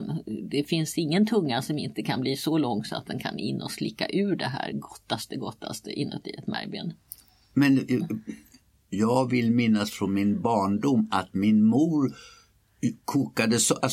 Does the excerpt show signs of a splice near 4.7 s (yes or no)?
no